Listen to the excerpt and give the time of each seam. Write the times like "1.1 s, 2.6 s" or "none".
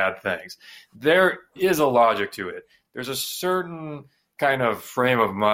none